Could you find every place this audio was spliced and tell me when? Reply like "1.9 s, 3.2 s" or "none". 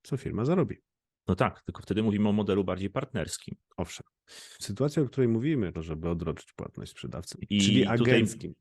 4.6 s, 5.7 s, 7.3 s